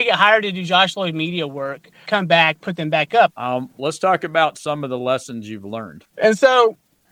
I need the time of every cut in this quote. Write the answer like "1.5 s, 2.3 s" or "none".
2.1 s, 3.3 s, 6.1 s